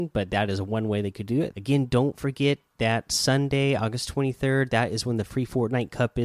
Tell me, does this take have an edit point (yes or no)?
yes